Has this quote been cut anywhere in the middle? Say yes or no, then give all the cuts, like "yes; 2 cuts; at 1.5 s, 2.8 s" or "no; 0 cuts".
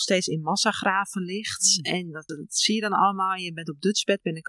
yes; 1 cut; at 2.3 s